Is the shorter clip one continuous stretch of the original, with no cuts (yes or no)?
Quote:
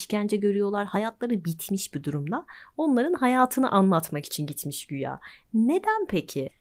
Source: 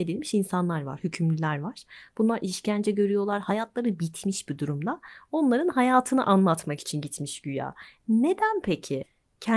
yes